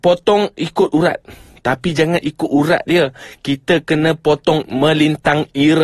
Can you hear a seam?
no; 0 cuts

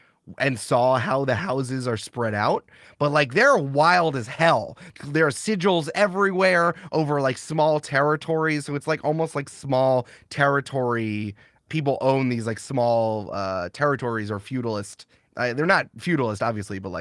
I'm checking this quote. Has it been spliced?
no; 0 cuts

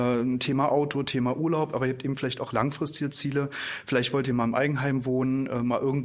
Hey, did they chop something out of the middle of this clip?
no; 0 cuts

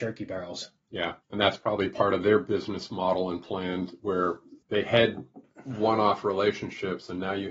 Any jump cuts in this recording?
yes; 2 cuts; at 1.2 s, 4.6 s

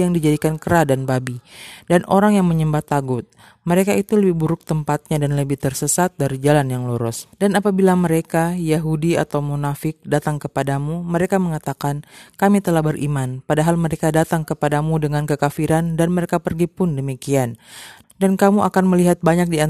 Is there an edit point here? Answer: yes; 2 cuts; at 7.3 s, 18.0 s

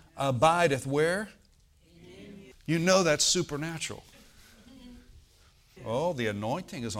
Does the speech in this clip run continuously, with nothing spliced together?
no; 2 cuts; at 2.5 s, 5.8 s

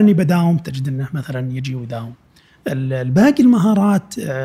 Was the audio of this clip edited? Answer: no; 0 cuts

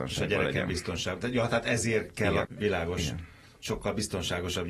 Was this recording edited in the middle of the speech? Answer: yes; 1 cut; at 2.4 s

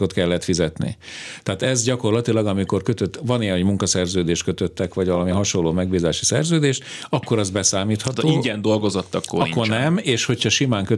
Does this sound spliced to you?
no; 0 cuts

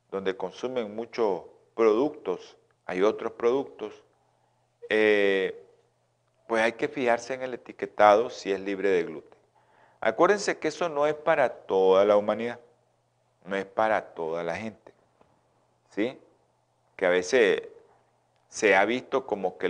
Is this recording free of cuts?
no; 1 cut; at 2.8 s

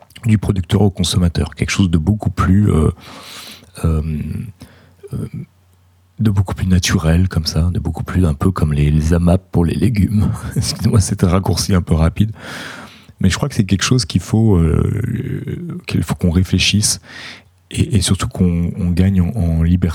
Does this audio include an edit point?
no; 0 cuts

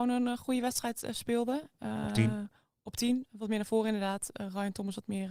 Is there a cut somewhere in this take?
no; 0 cuts

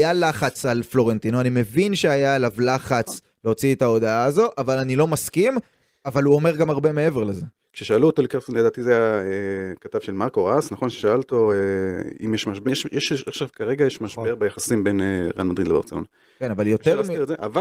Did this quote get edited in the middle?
yes; 1 cut; at 12.6 s

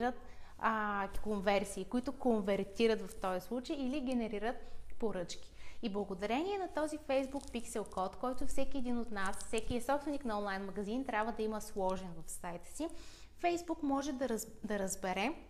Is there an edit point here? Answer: no; 0 cuts

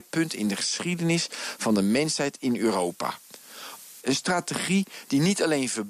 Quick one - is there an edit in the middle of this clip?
yes; 1 cut; at 4.0 s

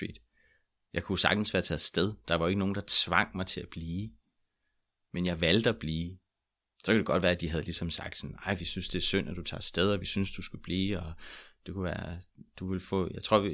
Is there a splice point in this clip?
no; 0 cuts

